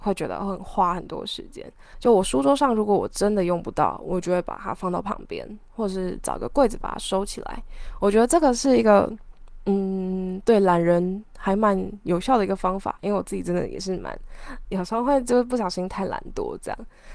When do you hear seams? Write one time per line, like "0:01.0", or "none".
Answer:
0:01.9